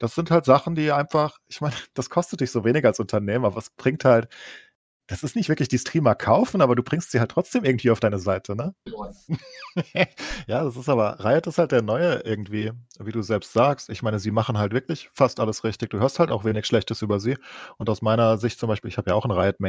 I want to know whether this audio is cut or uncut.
cut